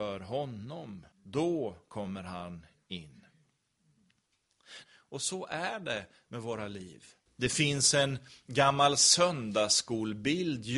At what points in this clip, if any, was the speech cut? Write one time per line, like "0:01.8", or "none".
0:01.1
0:04.8
0:07.3